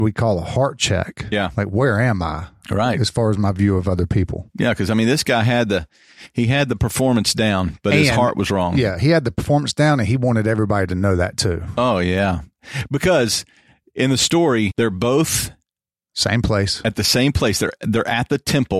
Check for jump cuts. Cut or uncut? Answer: cut